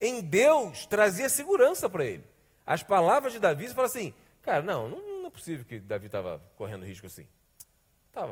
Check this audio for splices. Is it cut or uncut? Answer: uncut